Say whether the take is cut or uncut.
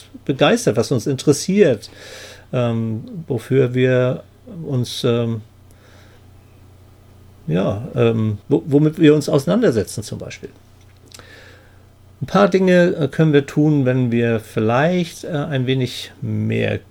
cut